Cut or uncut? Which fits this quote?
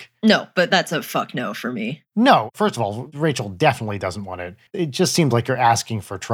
cut